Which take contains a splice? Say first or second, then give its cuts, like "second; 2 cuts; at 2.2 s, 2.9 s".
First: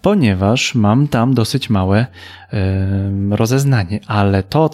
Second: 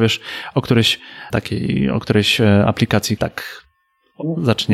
second; 2 cuts; at 1.3 s, 3.2 s